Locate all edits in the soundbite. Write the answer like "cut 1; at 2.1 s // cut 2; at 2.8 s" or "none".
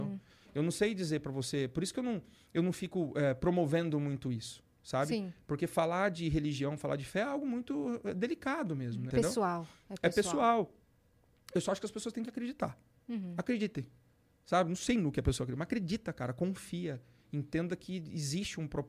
cut 1; at 9.1 s